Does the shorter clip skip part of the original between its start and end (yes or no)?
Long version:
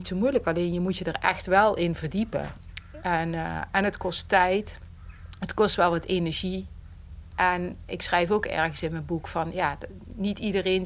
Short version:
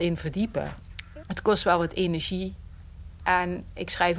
yes